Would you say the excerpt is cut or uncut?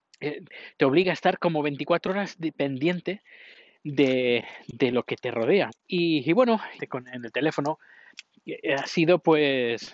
cut